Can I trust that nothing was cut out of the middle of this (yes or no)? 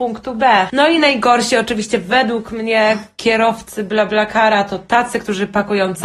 yes